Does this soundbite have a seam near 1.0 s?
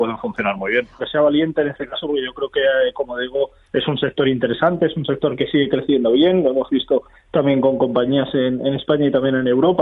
yes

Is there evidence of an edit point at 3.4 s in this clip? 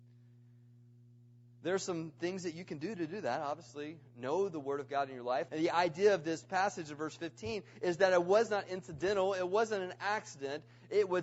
no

